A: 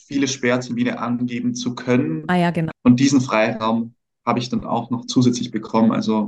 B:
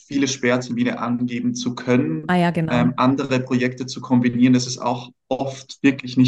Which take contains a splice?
A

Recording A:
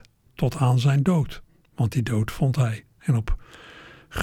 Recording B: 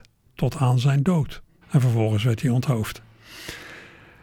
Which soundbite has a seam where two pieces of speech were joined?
B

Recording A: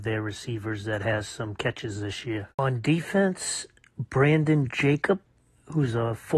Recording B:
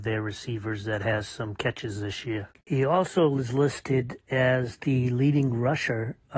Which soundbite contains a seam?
B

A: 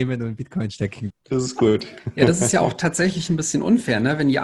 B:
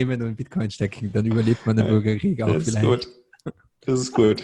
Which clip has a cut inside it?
A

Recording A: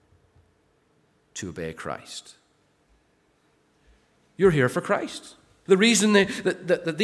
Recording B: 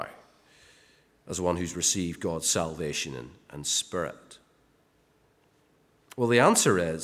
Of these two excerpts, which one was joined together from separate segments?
A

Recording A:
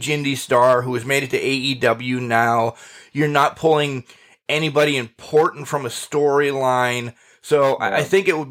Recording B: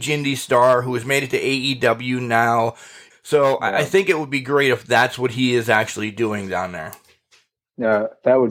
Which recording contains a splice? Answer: B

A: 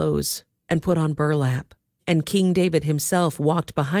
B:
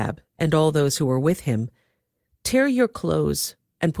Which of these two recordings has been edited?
A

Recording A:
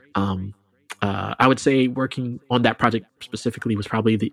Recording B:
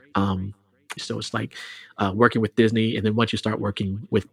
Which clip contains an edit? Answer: B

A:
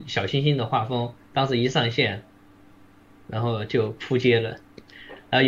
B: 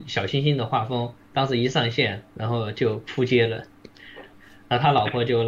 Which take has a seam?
B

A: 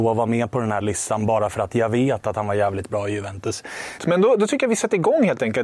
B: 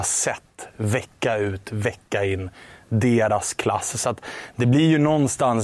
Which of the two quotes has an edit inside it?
A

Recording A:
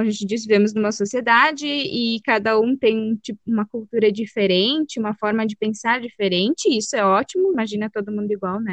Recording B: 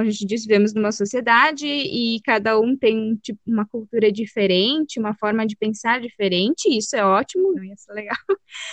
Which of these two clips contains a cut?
B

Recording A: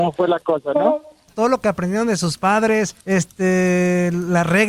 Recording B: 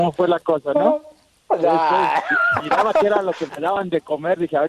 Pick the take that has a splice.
A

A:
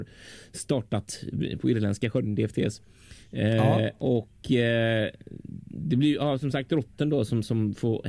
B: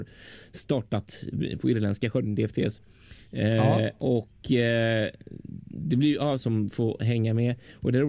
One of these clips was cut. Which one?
B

